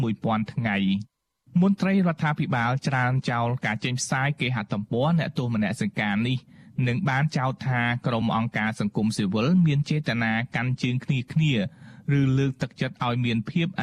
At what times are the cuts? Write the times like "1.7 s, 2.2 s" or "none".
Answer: none